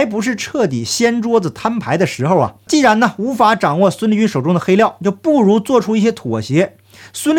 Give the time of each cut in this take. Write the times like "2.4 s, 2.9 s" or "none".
none